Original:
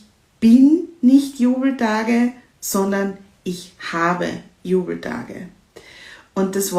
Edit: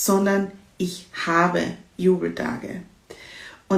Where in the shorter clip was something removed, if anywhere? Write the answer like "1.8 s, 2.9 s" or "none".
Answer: none

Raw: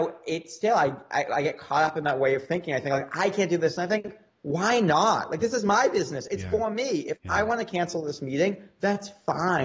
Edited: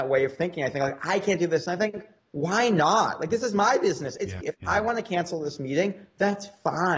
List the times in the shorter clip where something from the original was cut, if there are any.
4.4 s

